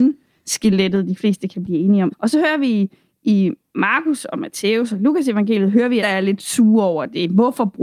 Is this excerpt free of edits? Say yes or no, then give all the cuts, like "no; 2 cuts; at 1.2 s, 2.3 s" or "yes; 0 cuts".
no; 2 cuts; at 2.1 s, 6.0 s